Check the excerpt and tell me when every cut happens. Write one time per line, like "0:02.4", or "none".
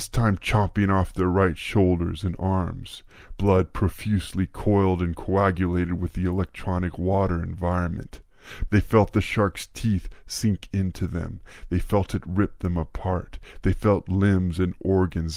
0:08.7